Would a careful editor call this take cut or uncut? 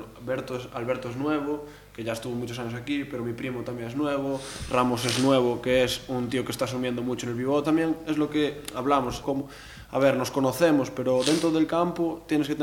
cut